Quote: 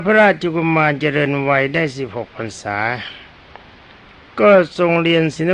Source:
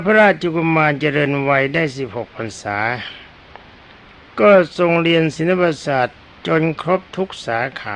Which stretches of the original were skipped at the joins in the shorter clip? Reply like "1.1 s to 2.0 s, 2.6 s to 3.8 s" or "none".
none